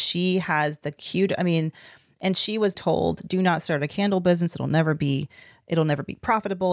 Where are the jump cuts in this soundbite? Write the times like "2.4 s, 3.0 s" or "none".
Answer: 2.8 s